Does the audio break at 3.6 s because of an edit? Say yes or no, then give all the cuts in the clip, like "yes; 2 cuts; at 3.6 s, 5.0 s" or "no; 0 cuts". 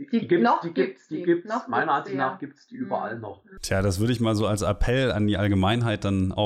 yes; 1 cut; at 3.6 s